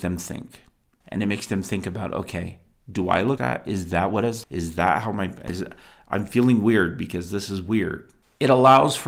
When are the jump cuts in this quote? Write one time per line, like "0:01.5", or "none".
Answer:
0:03.4
0:04.4